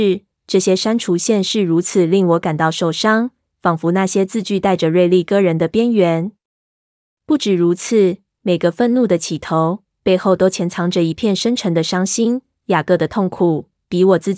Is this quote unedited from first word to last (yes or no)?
yes